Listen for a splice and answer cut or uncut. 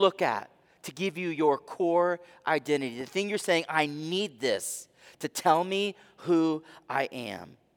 uncut